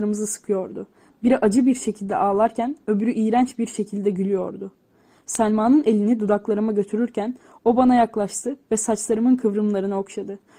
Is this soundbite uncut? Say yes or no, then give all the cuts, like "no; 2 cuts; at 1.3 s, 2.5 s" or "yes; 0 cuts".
yes; 0 cuts